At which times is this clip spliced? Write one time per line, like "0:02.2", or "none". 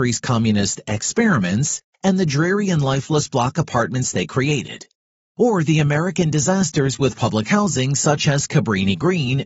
none